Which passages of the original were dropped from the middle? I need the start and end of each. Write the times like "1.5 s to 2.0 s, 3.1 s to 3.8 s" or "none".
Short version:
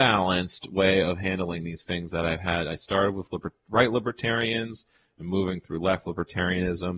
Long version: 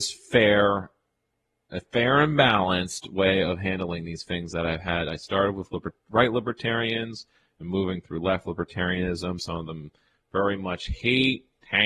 none